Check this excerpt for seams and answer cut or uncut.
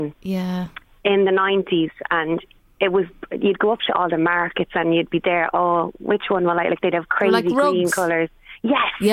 uncut